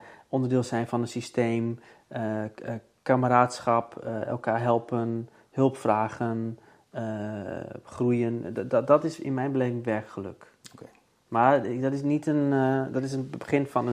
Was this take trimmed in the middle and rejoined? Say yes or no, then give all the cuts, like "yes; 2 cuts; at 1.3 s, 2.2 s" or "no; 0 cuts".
no; 0 cuts